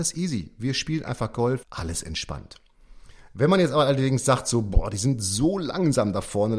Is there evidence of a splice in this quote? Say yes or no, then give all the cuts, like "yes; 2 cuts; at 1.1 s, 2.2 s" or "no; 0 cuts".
yes; 1 cut; at 1.6 s